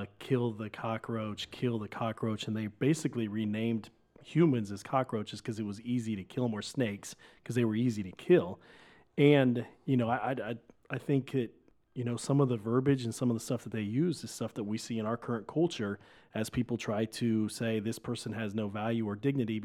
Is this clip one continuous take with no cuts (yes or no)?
yes